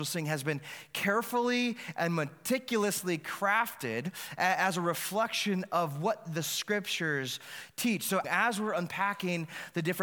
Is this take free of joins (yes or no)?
no